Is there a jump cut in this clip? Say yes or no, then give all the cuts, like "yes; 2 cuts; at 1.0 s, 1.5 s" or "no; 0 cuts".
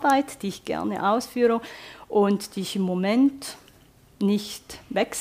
no; 0 cuts